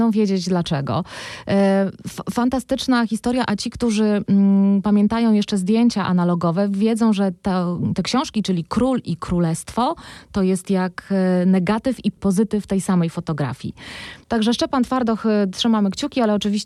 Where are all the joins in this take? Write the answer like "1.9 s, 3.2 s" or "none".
14.2 s